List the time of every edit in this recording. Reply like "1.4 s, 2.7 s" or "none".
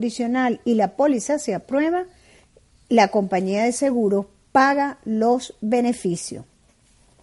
none